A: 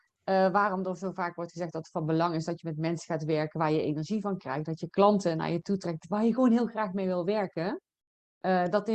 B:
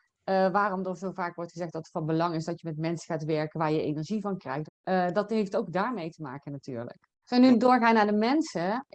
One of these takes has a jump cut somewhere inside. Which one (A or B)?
B